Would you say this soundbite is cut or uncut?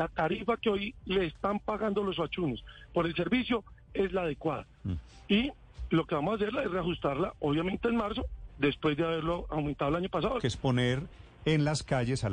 cut